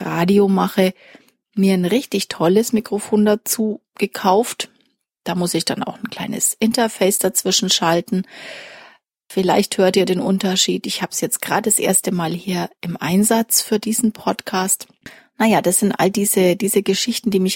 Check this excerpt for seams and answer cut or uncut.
uncut